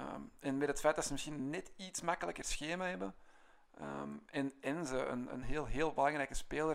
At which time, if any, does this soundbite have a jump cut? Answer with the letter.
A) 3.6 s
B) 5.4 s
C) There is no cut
B